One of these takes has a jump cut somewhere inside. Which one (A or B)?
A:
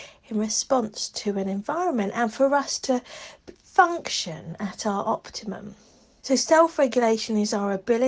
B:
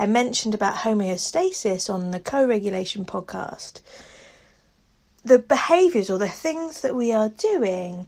A